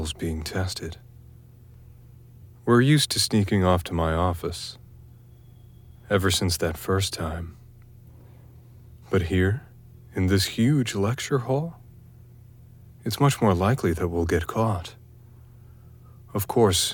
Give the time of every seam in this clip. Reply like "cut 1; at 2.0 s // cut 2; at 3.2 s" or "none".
none